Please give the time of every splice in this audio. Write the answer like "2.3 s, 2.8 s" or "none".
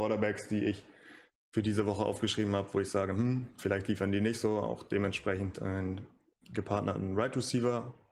none